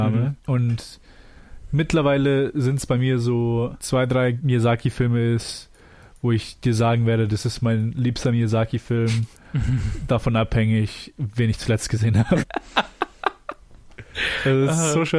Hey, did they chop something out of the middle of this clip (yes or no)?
yes